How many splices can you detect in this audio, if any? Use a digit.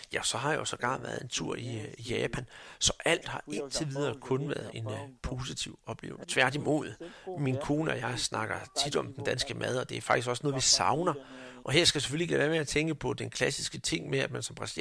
2